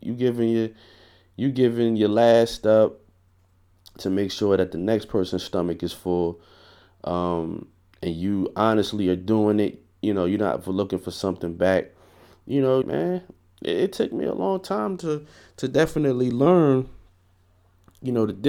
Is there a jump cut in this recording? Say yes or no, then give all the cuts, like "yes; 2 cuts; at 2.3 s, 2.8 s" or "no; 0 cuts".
yes; 1 cut; at 12.8 s